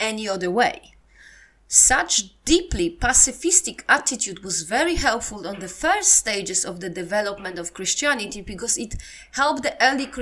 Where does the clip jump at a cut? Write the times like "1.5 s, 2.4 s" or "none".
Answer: none